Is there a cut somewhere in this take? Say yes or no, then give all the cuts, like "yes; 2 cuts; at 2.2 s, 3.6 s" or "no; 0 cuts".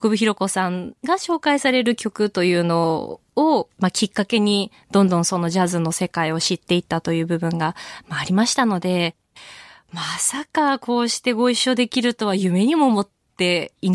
no; 0 cuts